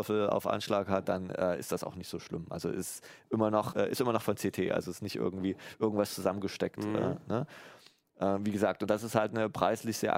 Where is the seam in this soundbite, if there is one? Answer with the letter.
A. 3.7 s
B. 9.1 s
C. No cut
A